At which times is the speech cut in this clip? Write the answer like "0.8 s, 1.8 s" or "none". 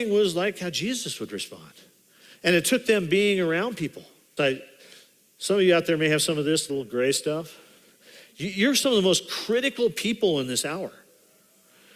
4.4 s, 6.7 s